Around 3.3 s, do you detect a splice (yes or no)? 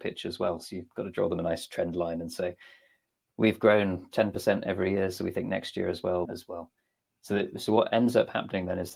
no